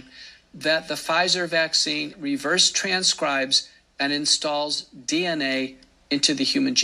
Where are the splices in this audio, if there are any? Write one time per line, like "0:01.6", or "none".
0:02.1